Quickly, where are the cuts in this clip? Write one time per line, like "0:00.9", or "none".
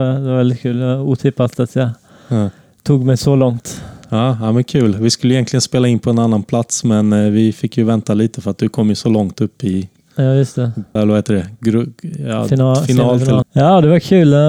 0:11.0
0:13.4